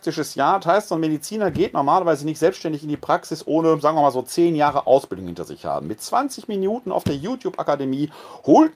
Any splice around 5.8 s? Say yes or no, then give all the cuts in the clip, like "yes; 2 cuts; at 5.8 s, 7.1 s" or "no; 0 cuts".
no; 0 cuts